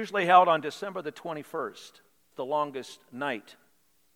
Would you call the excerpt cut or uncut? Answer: cut